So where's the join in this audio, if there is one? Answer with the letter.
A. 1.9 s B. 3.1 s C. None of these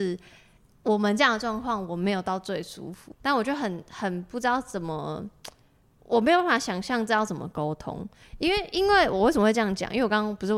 B